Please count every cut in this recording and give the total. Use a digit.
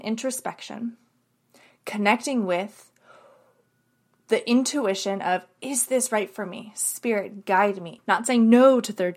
1